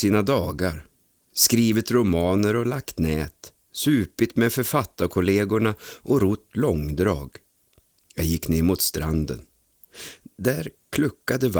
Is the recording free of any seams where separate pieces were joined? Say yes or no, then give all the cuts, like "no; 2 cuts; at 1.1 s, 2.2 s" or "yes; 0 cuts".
yes; 0 cuts